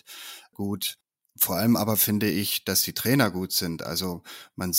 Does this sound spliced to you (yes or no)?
no